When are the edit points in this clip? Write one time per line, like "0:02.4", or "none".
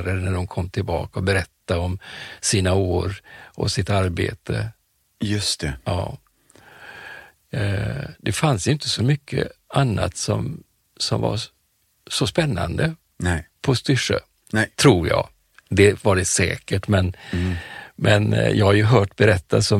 none